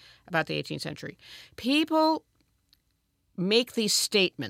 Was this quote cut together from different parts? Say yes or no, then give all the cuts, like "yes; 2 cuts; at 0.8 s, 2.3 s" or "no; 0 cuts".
no; 0 cuts